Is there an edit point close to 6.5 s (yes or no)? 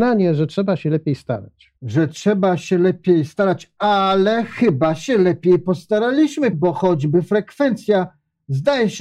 yes